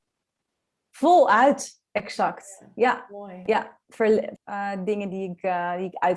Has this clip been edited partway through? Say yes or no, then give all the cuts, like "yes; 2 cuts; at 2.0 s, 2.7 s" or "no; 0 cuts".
yes; 1 cut; at 4.4 s